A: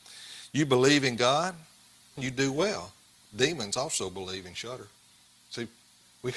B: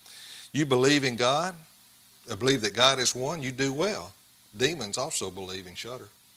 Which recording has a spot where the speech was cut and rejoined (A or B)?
A